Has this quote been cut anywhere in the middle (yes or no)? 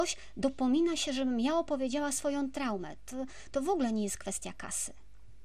no